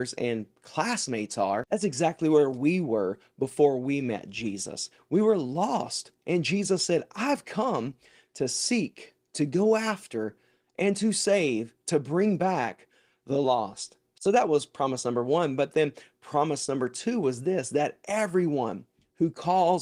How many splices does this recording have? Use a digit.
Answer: 0